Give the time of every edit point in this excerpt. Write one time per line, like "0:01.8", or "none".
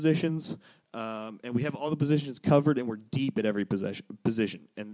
none